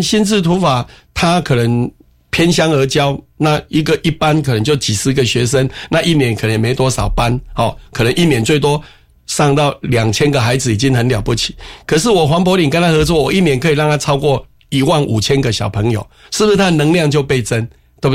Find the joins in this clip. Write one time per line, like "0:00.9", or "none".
none